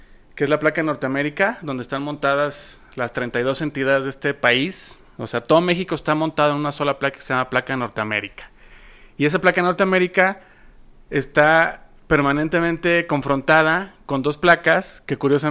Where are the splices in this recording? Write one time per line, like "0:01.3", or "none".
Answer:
none